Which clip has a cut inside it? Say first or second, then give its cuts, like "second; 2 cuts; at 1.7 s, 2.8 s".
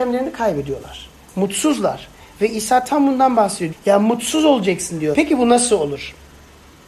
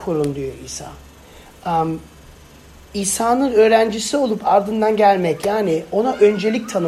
first; 2 cuts; at 3.7 s, 5.1 s